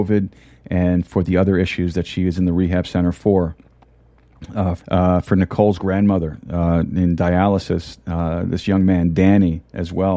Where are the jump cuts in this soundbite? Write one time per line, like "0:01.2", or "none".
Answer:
0:04.8